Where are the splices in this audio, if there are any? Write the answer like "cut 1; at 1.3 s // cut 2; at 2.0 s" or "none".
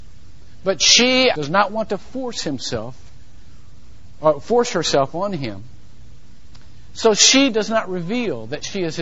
cut 1; at 1.3 s